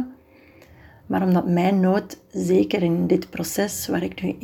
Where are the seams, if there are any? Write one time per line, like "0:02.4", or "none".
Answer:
none